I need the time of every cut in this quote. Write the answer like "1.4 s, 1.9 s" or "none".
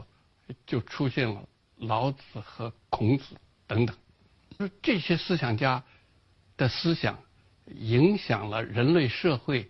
none